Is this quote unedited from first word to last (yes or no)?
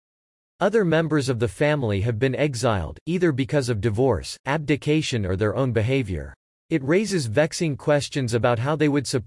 no